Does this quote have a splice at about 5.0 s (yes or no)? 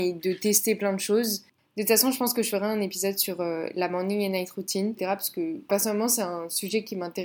yes